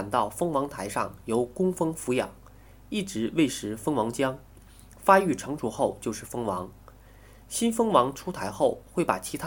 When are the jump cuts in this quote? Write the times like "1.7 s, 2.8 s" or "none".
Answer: none